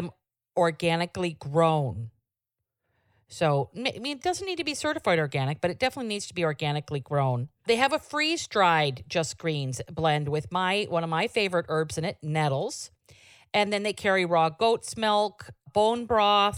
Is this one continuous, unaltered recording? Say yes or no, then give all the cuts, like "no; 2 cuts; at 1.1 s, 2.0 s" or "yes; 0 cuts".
yes; 0 cuts